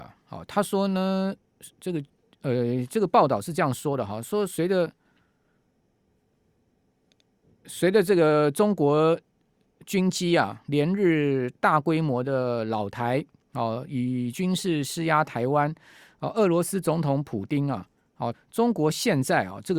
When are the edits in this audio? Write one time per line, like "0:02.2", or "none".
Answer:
0:18.3